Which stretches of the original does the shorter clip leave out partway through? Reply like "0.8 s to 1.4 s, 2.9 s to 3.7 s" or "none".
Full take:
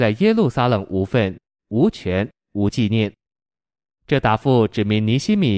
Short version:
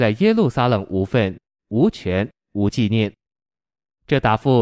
none

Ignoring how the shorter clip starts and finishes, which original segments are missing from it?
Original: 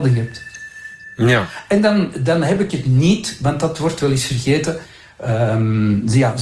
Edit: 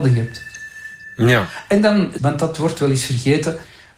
2.2 s to 3.4 s

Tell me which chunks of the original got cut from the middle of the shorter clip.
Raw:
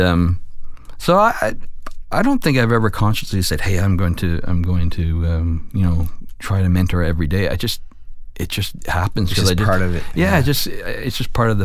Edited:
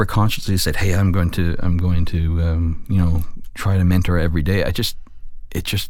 none

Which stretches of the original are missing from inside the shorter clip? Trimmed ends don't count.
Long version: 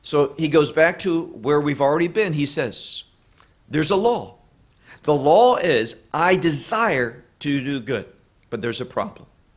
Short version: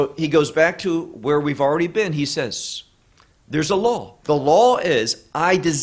4.4 s to 5.0 s

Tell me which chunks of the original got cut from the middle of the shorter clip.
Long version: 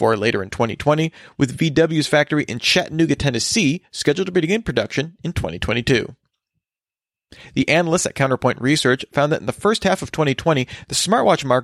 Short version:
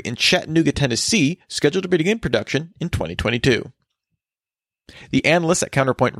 none

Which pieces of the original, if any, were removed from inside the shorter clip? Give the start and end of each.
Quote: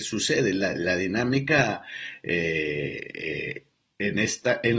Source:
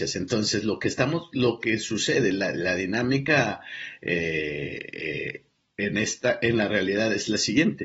none

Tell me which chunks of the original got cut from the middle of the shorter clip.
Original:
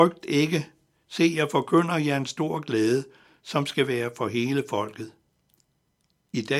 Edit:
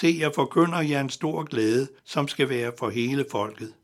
3.2 s to 3.4 s

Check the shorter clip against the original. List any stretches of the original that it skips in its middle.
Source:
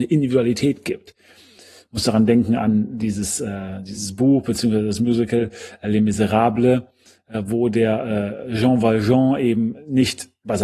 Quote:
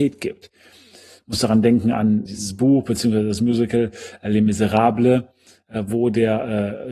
2.9 s to 3.8 s

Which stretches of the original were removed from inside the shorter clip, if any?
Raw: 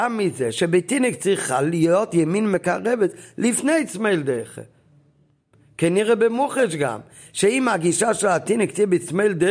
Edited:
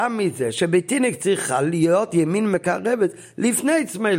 none

